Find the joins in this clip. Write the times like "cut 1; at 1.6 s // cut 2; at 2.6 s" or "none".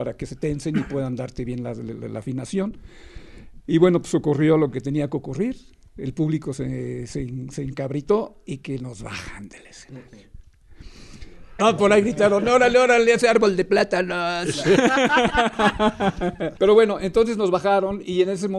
cut 1; at 11.6 s